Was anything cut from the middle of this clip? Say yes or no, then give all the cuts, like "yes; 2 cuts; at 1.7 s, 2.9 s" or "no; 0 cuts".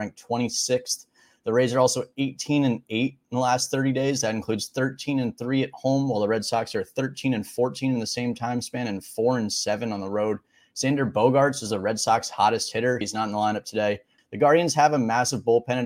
yes; 2 cuts; at 13.0 s, 14.2 s